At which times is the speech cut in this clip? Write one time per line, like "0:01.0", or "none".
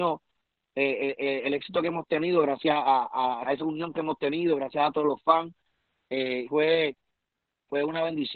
0:03.4
0:06.5